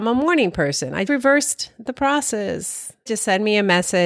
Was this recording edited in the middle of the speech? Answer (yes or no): yes